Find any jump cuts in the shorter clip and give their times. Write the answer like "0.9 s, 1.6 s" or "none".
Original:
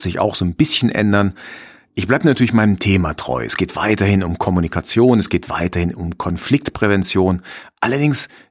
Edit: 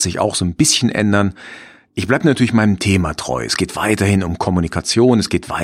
none